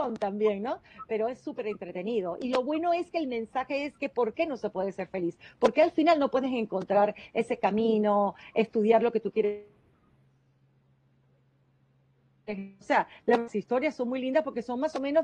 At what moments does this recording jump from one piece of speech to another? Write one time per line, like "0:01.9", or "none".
0:12.8